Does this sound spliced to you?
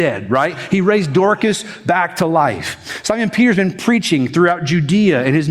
no; 0 cuts

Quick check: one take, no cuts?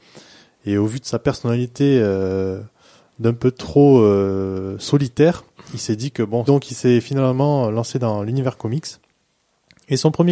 no; 1 cut; at 6.5 s

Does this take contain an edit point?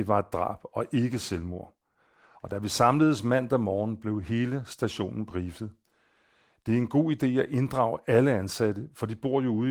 no; 0 cuts

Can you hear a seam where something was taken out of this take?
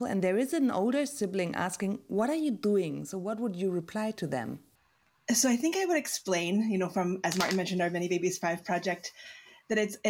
no; 0 cuts

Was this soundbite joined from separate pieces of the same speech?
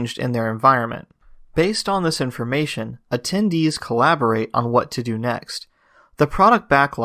no; 0 cuts

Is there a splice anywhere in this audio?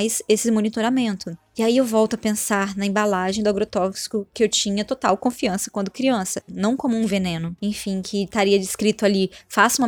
yes; 2 cuts; at 6.5 s, 7.6 s

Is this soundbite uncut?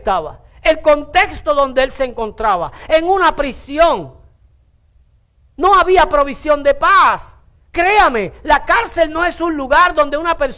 yes; 0 cuts

